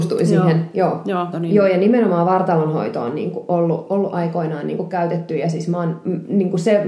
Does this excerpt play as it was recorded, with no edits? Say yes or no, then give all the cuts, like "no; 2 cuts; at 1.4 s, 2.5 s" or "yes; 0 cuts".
no; 1 cut; at 1.3 s